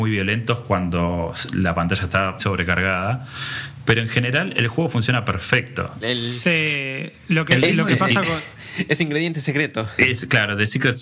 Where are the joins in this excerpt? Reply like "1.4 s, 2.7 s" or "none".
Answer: 2.4 s, 6.0 s